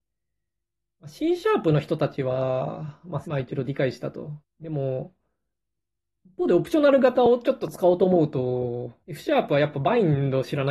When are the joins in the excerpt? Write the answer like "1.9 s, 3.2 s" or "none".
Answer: 3.2 s, 4.4 s, 9.0 s